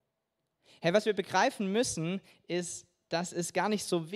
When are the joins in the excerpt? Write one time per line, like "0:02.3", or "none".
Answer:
none